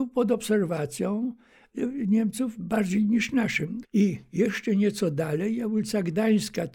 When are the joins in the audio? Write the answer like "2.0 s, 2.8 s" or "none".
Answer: 3.8 s